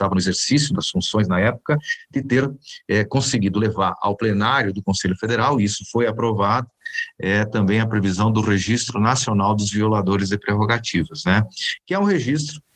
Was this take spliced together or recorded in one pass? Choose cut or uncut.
uncut